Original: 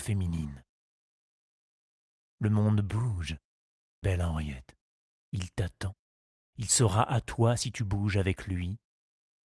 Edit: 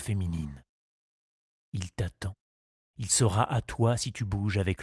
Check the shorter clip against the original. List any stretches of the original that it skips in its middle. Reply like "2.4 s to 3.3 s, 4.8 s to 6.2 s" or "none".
1.5 s to 5.1 s